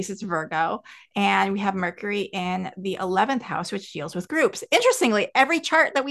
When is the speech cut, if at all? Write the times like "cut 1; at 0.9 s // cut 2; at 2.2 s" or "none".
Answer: none